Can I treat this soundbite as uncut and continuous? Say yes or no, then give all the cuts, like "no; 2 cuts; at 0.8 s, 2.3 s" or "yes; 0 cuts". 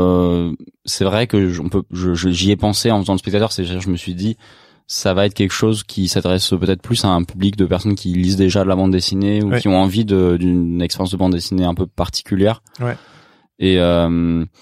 yes; 0 cuts